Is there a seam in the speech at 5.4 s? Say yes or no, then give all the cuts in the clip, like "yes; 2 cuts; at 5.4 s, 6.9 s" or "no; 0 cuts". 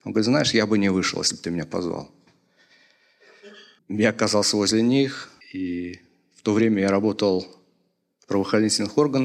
yes; 2 cuts; at 3.8 s, 5.4 s